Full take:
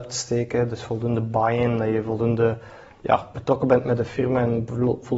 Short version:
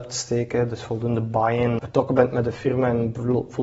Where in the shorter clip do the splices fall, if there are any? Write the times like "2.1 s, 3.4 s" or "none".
1.8 s

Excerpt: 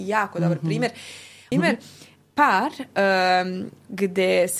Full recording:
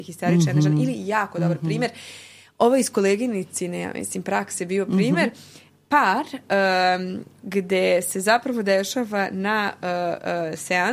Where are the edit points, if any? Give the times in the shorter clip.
1.5 s

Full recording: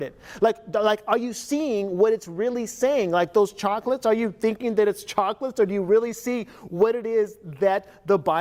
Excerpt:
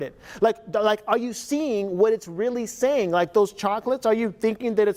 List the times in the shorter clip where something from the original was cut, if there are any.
none

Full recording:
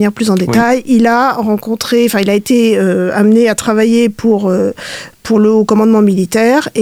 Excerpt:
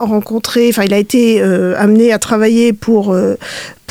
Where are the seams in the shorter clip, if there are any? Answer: none

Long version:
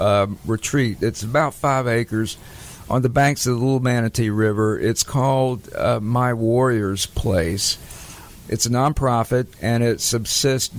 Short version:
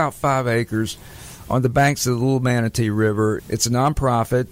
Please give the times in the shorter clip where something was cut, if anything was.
3.4 s

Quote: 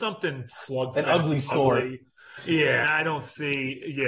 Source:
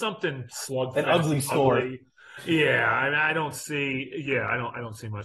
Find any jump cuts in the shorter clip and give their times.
2.8 s

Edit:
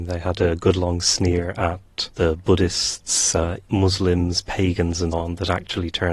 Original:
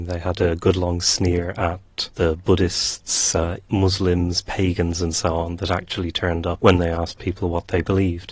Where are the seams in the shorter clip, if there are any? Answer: 5.1 s

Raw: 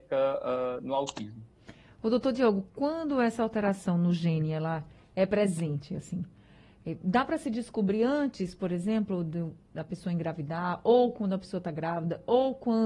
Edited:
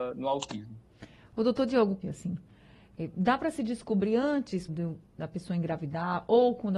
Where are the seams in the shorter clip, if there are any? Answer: 2.0 s, 4.7 s

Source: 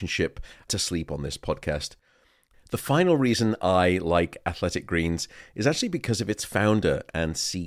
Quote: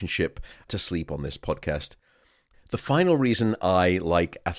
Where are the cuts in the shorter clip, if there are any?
none

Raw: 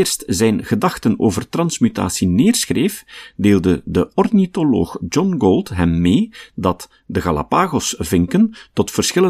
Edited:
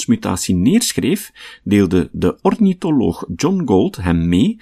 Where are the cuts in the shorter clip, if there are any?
none

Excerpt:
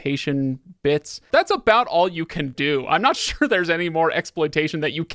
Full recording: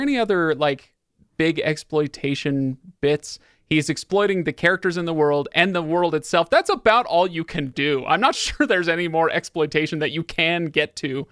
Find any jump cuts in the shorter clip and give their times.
1.3 s

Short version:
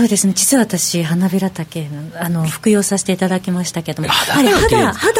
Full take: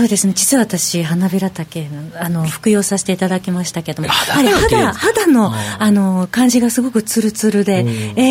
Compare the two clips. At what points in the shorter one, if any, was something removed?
none

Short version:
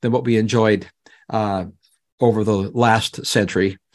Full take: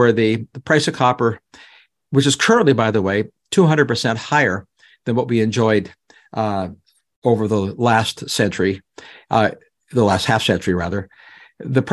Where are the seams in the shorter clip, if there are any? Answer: none

